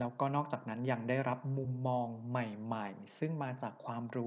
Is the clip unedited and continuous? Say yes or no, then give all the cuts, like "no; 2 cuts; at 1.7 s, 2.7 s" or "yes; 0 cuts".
yes; 0 cuts